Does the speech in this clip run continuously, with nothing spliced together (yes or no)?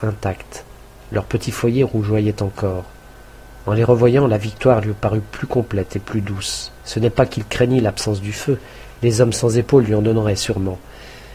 no